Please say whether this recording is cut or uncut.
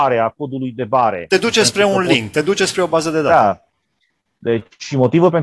uncut